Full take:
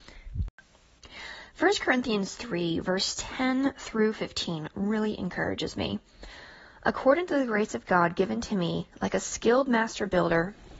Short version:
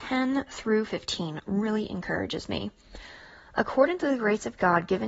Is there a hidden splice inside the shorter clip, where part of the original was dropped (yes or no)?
no